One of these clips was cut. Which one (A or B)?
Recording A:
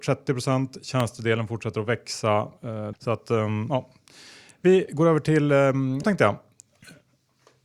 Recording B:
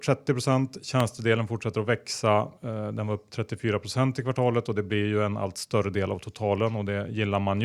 A